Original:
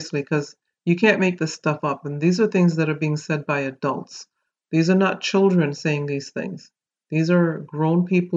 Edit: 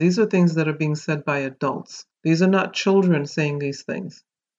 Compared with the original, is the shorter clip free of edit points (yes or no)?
no